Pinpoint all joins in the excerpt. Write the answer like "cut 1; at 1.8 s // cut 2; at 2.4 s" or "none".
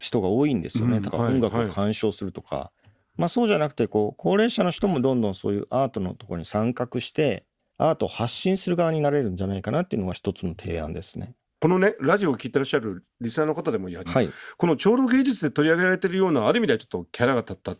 cut 1; at 1.1 s // cut 2; at 11.5 s // cut 3; at 14.1 s